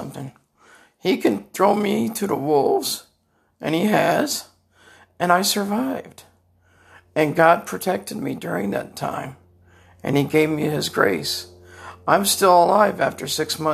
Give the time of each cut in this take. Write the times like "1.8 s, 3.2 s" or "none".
none